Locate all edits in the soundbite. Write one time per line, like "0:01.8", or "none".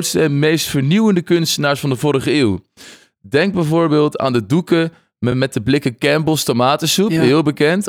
none